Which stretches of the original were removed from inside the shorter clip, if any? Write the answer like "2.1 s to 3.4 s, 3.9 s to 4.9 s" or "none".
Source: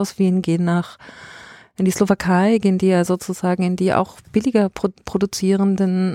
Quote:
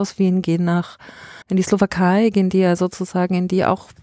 1.4 s to 1.7 s